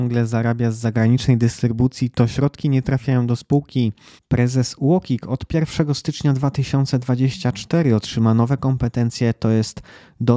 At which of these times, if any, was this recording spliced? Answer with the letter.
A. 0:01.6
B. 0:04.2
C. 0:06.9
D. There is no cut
B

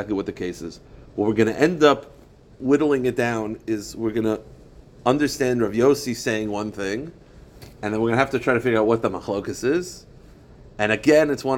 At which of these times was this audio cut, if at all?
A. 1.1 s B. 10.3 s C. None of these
C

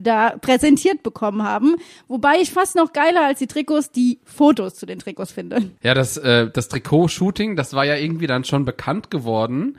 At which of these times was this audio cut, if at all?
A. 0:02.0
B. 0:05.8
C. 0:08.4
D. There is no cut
B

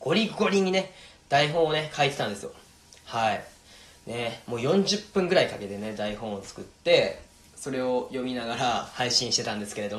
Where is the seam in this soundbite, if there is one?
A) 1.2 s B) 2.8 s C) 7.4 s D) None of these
D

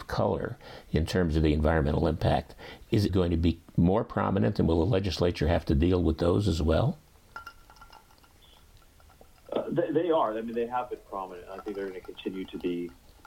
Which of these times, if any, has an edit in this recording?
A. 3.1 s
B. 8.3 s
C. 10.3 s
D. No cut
A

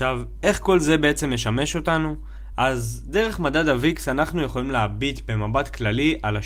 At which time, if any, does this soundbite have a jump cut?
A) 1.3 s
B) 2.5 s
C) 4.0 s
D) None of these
D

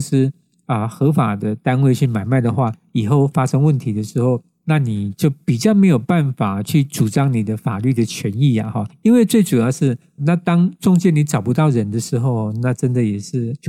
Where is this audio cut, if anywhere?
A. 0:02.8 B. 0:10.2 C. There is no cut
B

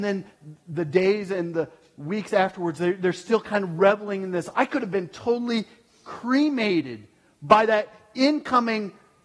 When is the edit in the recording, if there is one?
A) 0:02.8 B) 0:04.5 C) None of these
B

